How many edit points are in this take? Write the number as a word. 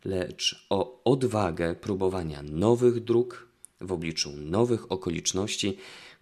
zero